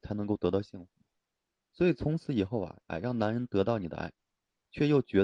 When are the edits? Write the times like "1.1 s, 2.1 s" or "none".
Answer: 2.8 s